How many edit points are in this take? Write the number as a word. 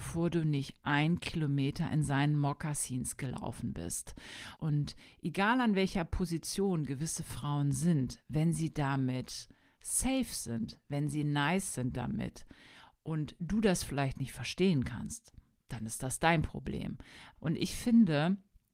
two